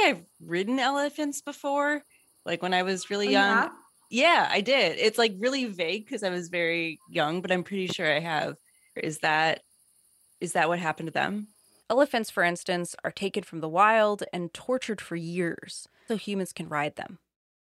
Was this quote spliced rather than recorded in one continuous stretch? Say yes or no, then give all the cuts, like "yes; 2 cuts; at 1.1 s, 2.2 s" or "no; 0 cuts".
yes; 3 cuts; at 4.1 s, 11.8 s, 16.1 s